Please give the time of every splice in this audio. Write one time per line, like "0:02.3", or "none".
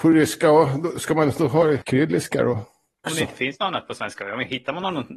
0:03.1